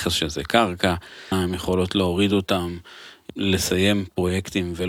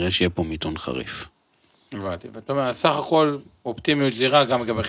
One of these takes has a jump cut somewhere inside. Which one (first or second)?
first